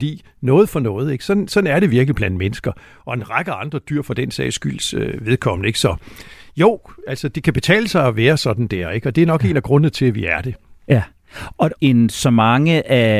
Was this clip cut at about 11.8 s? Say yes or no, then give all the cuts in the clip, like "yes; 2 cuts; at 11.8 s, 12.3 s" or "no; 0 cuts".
yes; 1 cut; at 11.8 s